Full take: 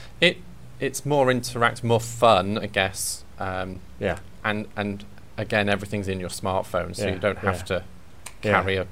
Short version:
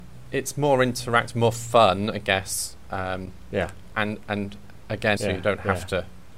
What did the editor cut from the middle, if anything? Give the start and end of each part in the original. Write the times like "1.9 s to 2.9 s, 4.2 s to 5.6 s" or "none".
5.6 s to 6.9 s